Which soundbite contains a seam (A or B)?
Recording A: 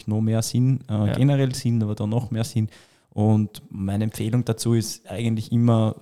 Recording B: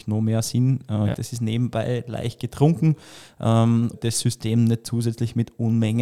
B